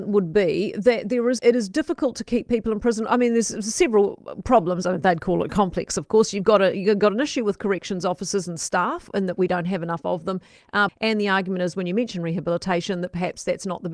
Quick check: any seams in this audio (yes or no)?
yes